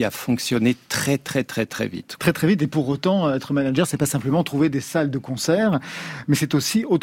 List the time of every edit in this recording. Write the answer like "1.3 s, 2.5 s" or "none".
2.2 s